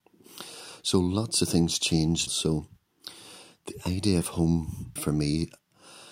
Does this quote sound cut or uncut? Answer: cut